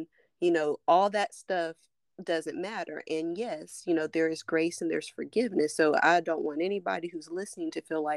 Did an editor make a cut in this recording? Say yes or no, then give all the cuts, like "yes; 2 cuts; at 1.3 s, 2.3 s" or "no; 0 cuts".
no; 0 cuts